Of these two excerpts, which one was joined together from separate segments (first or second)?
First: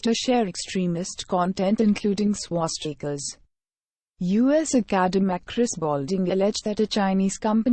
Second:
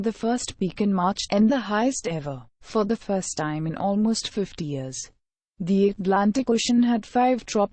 second